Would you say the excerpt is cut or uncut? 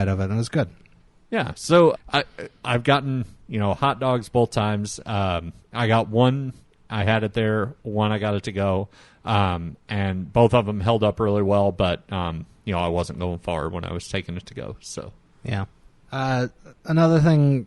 cut